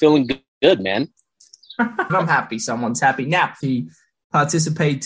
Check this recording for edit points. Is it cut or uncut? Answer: cut